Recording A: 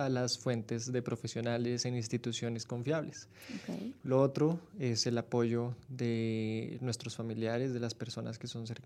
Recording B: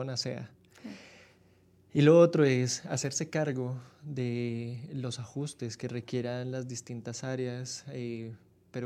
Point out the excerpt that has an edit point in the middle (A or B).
A